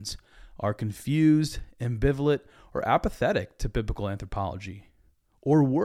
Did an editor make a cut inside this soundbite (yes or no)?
no